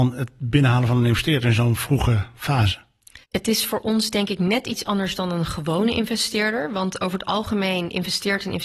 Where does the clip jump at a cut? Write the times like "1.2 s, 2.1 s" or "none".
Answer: 3.2 s